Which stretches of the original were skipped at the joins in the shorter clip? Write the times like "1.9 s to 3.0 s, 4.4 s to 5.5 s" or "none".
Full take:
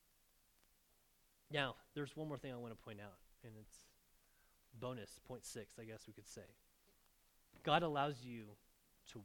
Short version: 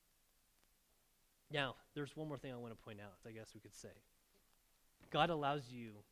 3.2 s to 5.8 s